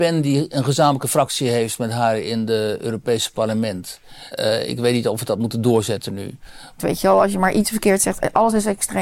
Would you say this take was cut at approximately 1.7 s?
no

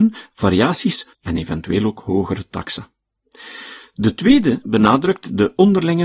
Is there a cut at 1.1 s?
yes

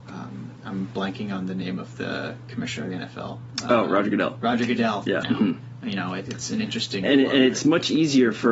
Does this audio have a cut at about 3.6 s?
no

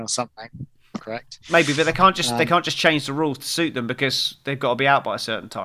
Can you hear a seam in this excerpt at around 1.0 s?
yes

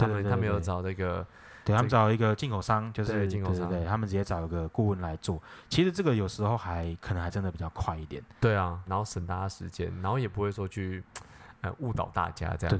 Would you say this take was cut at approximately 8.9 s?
yes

